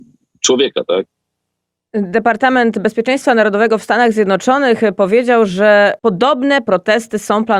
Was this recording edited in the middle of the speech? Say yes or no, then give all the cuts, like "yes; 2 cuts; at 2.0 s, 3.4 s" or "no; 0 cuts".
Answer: yes; 1 cut; at 6.0 s